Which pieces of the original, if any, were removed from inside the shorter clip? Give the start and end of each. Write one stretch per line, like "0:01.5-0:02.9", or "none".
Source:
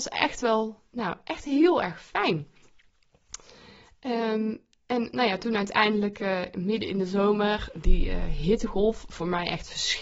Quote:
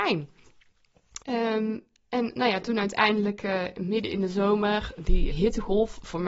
0:03.4-0:04.0
0:08.1-0:08.4